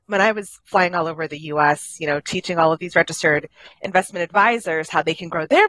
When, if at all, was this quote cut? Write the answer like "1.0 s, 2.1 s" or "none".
none